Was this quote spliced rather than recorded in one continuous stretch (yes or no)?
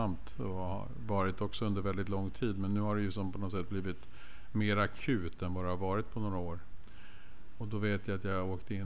no